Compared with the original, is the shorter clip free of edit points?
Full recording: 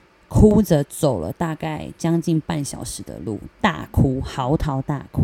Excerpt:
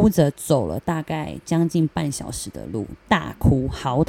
yes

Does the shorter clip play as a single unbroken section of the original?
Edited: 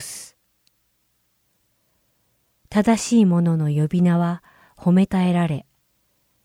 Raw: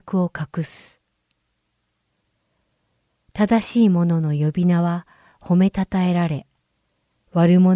no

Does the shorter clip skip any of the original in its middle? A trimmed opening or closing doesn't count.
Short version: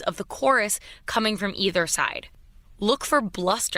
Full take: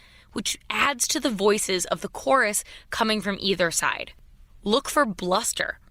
no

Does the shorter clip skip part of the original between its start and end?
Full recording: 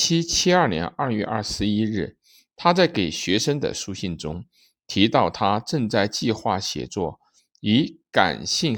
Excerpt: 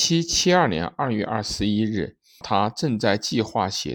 yes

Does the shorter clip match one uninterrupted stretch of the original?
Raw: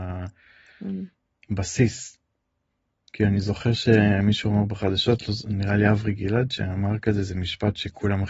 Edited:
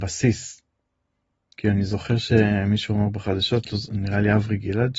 yes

